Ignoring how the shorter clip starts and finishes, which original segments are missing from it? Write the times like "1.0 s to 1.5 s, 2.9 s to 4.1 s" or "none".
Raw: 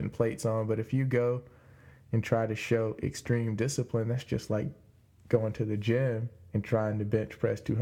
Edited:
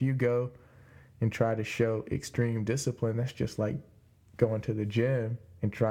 none